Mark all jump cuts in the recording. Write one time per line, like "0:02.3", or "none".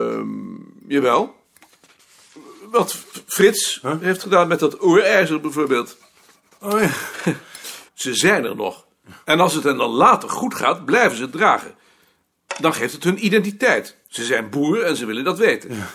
0:07.9